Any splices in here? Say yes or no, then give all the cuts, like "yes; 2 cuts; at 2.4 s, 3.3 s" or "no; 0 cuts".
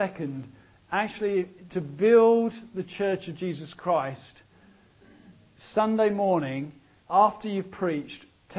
yes; 1 cut; at 7.0 s